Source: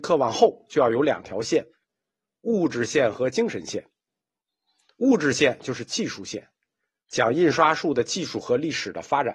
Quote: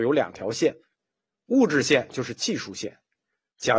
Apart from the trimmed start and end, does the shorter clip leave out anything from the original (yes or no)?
yes